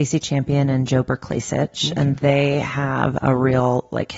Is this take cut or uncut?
cut